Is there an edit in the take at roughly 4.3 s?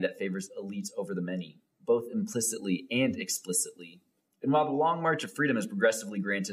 yes; 1 cut; at 4.3 s

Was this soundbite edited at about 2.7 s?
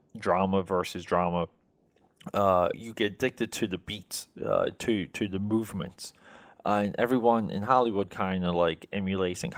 yes; 1 cut; at 2.7 s

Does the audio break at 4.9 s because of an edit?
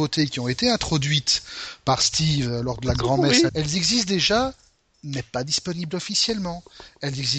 no; 1 cut; at 3.5 s

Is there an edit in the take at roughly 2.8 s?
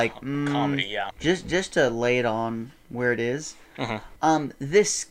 no; 2 cuts; at 1.1 s, 4.2 s

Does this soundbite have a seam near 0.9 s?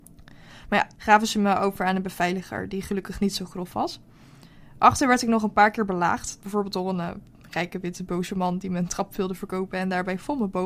yes; 1 cut; at 0.9 s

